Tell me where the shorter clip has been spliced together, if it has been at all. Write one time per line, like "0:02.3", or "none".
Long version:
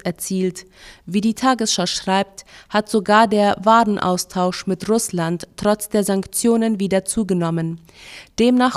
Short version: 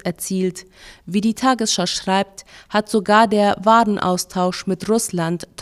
none